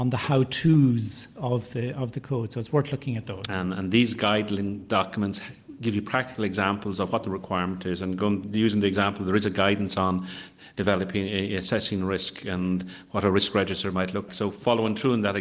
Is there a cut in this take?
yes; 2 cuts; at 3.5 s, 14.3 s

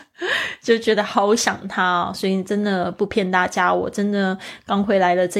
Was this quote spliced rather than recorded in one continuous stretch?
no; 0 cuts

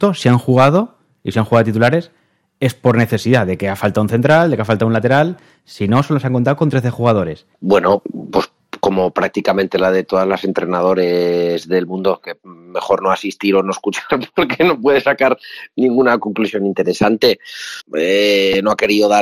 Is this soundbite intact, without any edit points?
no; 2 cuts; at 7.5 s, 17.8 s

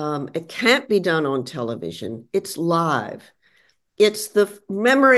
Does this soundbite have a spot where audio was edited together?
no; 0 cuts

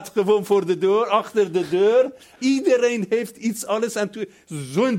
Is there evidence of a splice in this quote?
yes; 1 cut; at 2.4 s

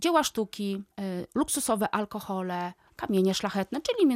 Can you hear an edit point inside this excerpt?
yes; 2 cuts; at 0.9 s, 2.9 s

